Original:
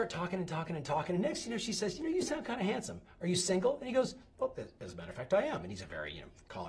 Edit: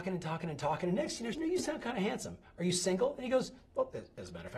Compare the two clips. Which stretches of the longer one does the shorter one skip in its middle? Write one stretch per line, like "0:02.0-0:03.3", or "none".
0:01.6-0:02.0

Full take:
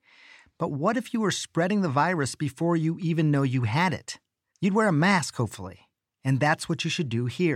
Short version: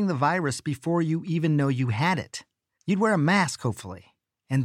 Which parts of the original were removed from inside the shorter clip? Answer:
none

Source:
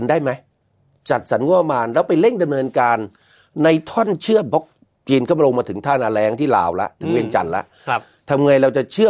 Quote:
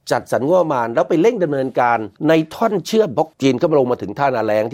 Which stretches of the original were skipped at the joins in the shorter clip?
0:03.2-0:03.5
0:04.7-0:05.0

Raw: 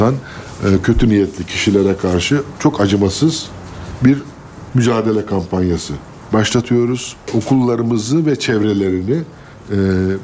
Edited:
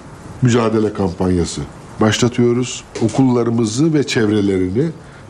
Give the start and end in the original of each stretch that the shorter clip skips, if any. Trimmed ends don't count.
none

